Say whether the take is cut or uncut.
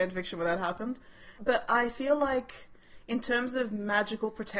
cut